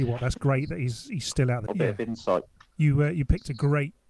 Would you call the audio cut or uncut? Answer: cut